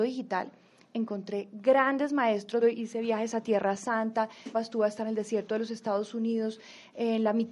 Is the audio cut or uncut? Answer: cut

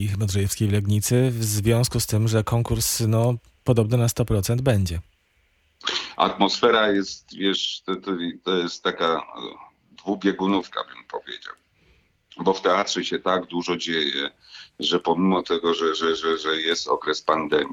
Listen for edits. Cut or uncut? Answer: uncut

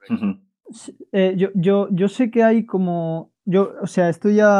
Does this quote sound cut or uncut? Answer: uncut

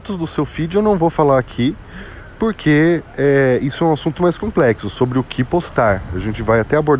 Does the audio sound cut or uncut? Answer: cut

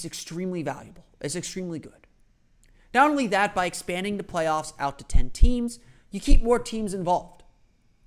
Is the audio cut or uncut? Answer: uncut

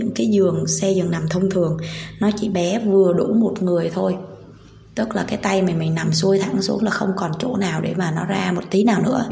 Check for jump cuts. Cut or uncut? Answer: uncut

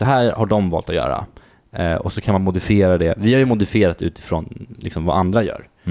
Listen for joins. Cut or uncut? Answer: uncut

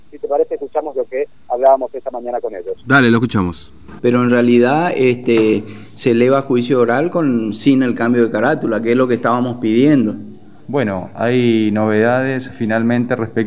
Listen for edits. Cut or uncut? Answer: cut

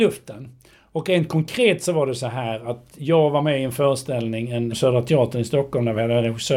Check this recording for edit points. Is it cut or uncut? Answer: cut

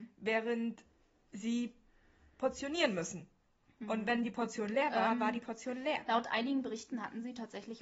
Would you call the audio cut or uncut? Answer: uncut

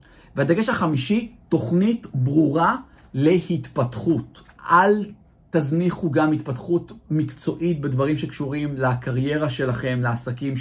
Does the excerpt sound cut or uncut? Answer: cut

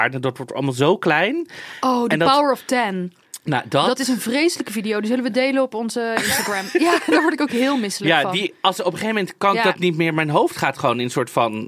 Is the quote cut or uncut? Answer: uncut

